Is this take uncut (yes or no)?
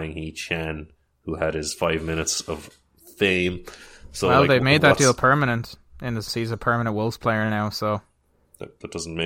no